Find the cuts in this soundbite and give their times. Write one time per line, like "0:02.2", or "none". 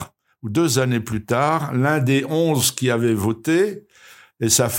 none